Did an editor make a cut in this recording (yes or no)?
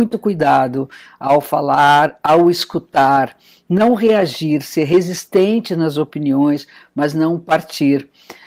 no